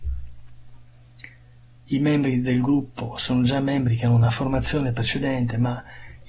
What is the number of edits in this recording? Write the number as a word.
zero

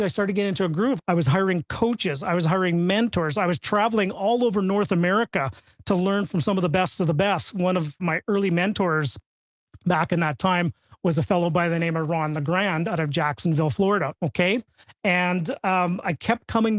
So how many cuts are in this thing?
three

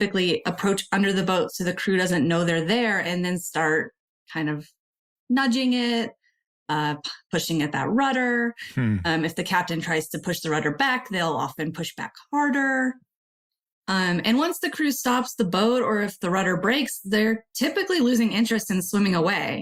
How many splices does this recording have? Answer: zero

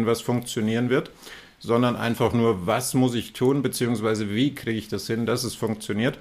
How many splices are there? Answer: zero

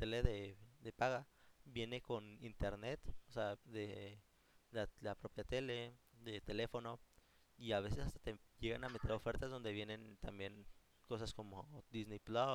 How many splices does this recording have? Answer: one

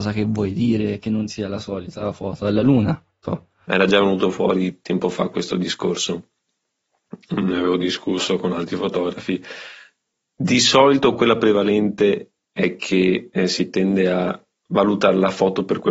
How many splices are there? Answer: one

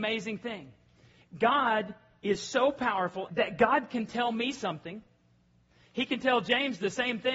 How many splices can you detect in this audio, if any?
one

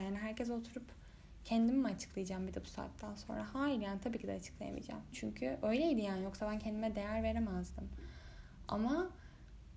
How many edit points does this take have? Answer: one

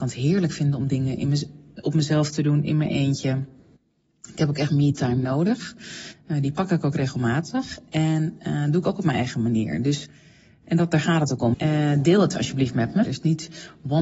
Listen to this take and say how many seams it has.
two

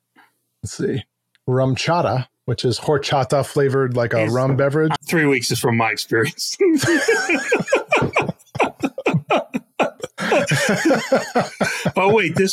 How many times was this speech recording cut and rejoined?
one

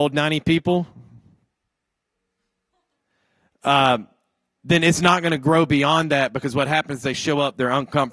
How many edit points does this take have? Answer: zero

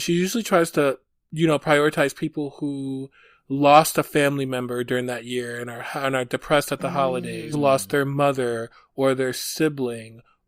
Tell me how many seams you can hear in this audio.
one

